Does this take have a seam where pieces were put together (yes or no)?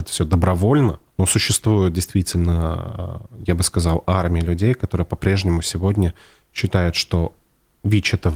yes